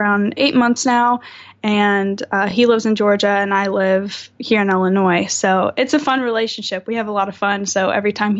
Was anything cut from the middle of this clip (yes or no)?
no